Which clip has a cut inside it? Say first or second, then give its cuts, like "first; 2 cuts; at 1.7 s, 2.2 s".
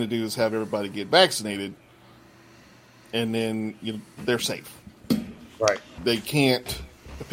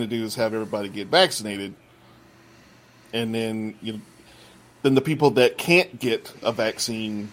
first; 2 cuts; at 4.2 s, 6.0 s